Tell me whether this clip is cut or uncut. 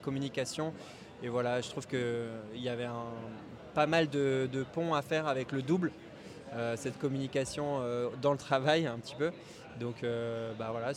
uncut